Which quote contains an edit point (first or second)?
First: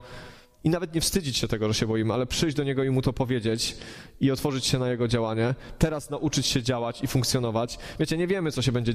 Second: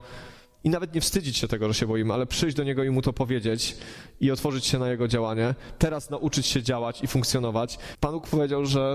second